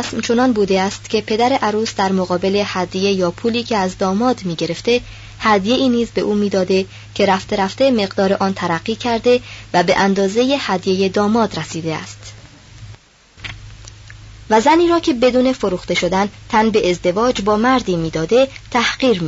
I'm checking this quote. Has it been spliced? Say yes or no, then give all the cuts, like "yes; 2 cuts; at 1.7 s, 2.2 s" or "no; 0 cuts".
yes; 1 cut; at 14.5 s